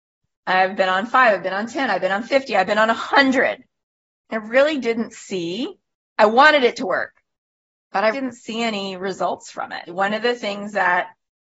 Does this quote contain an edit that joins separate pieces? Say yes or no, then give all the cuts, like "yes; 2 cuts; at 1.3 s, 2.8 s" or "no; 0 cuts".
yes; 2 cuts; at 8.1 s, 9.9 s